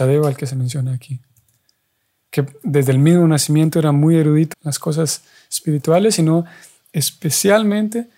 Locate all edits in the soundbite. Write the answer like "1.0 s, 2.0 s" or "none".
4.5 s

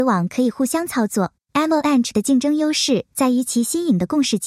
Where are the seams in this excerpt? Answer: none

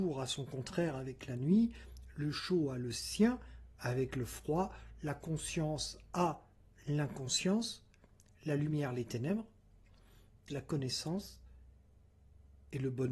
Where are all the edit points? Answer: 10.5 s

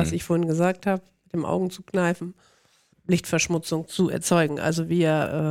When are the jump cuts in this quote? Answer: 2.9 s

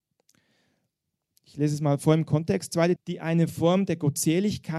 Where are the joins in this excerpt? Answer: 3.0 s

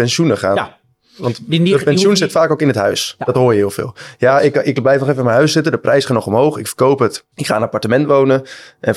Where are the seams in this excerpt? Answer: 7.3 s

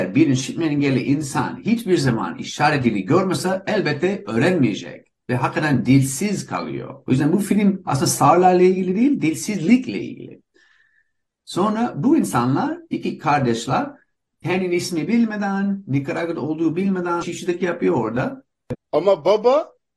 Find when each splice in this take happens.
17.2 s, 18.7 s

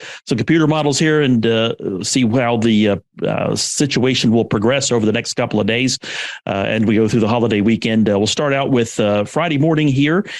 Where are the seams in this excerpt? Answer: none

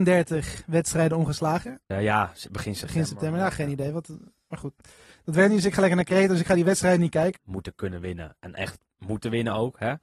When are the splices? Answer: 1.9 s, 7.4 s

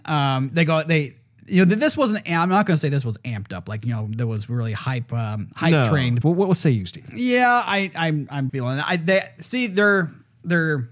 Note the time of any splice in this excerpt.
6.2 s, 8.5 s

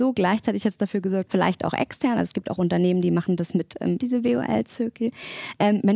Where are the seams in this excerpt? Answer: 1.3 s, 4.0 s

